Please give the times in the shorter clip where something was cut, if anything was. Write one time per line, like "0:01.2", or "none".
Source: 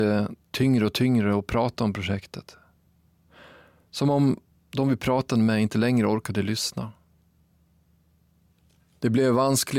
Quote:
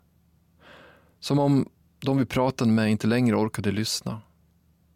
none